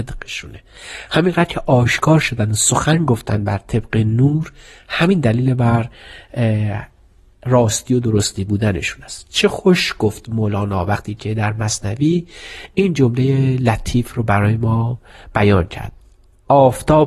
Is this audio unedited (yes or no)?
yes